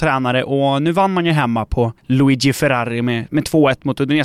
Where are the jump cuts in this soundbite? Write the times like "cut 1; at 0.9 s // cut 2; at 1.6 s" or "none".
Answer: cut 1; at 2.0 s

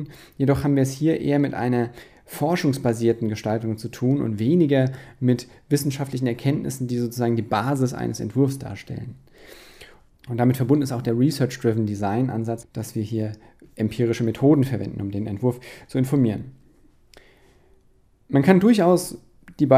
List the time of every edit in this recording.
cut 1; at 10.1 s // cut 2; at 12.6 s

